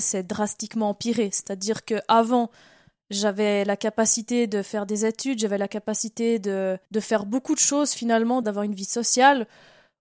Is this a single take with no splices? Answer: no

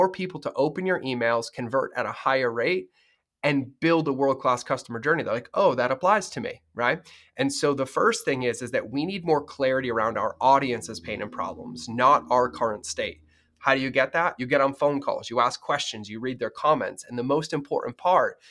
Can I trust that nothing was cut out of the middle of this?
yes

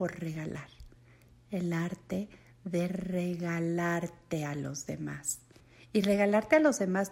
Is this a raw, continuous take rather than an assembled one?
yes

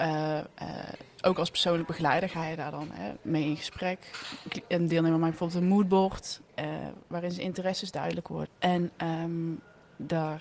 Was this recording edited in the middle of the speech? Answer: yes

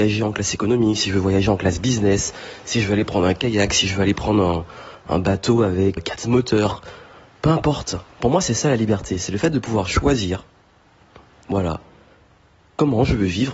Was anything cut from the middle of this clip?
yes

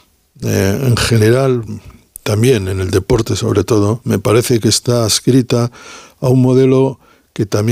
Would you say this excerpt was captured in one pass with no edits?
yes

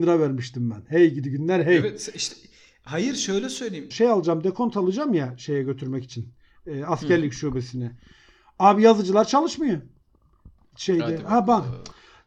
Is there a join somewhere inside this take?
yes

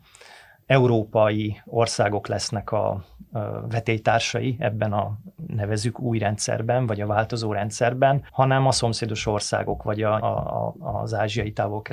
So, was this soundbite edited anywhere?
yes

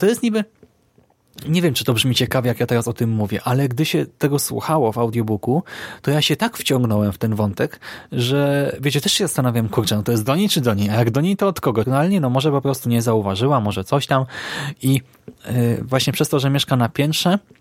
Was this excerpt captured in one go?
no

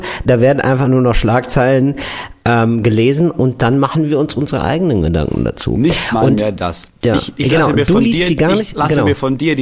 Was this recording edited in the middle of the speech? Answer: no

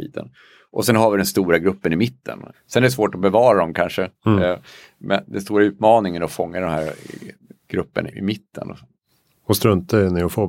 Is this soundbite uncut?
no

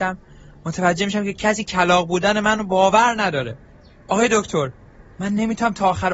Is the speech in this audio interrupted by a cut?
no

